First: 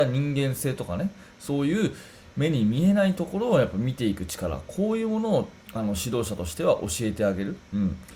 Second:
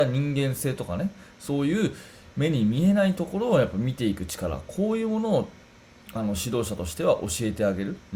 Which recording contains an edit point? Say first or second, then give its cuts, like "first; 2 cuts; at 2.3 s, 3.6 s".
first; 1 cut; at 5.6 s